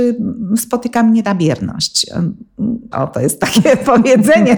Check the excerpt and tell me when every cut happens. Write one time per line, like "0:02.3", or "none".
0:02.9